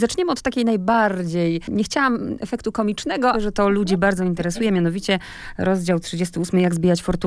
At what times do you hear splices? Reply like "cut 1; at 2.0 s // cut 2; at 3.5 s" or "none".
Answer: cut 1; at 3.3 s